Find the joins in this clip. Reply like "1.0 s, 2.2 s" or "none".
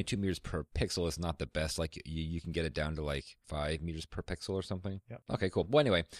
none

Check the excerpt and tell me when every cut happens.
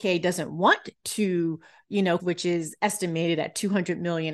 2.2 s

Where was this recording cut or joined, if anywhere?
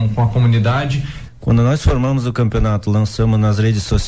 1.3 s

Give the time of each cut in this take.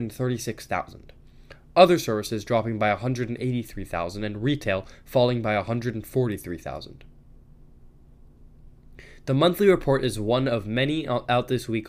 none

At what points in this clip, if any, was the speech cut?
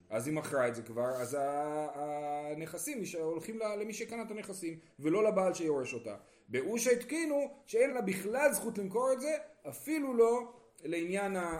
7.9 s

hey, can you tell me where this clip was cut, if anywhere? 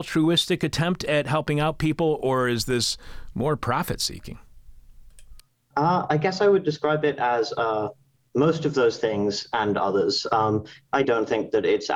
11.0 s

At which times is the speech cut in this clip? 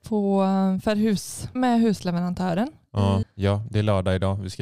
1.6 s, 3.2 s

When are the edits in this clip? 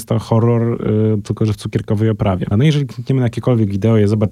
2.5 s

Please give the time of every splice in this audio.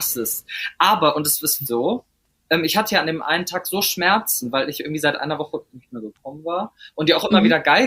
1.7 s

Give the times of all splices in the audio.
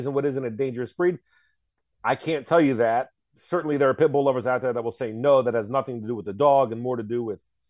none

